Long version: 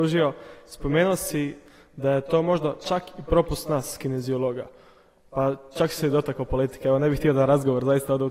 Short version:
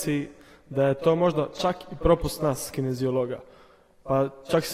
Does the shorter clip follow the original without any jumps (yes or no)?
yes